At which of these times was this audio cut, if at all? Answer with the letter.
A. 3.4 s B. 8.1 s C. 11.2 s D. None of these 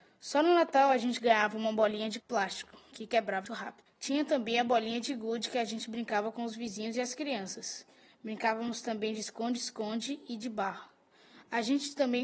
A